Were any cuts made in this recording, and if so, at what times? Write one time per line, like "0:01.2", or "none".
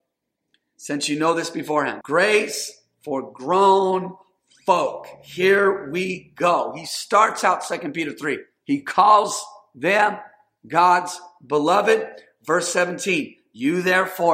0:02.0